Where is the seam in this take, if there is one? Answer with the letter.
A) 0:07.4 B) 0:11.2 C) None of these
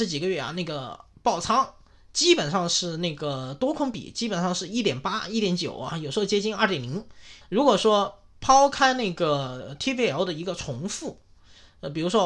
A